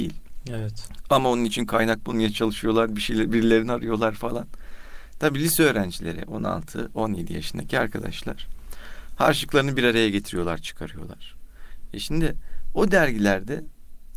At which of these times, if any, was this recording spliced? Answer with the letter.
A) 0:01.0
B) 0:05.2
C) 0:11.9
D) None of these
D